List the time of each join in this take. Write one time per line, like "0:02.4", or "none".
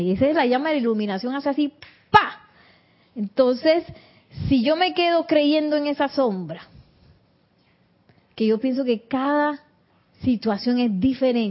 none